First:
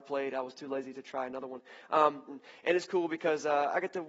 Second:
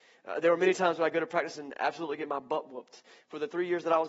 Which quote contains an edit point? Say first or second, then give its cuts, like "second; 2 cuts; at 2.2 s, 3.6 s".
first; 1 cut; at 2.3 s